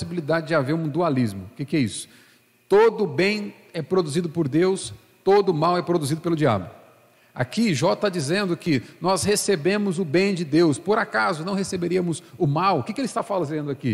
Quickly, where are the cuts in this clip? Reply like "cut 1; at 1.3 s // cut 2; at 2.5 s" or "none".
none